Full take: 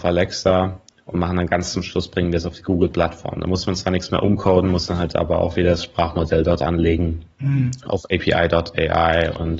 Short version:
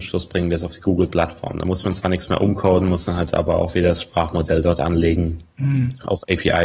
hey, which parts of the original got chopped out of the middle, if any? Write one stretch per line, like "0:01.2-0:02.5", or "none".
none